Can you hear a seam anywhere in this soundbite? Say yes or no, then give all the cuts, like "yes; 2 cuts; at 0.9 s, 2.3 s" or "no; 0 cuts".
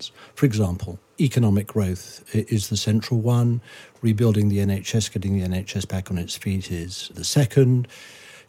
yes; 1 cut; at 7.1 s